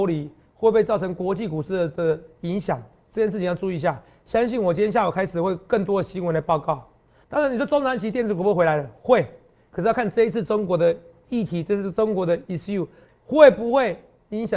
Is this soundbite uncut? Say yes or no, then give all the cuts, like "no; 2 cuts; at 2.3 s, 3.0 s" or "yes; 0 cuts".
no; 2 cuts; at 7.2 s, 13.1 s